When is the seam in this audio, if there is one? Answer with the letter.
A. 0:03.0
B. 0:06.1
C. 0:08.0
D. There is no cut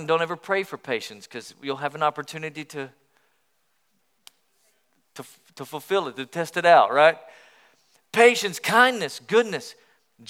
D